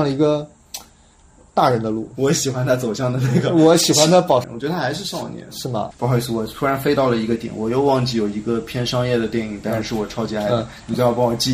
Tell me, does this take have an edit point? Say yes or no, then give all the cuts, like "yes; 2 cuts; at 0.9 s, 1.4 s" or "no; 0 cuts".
yes; 2 cuts; at 4.4 s, 5.9 s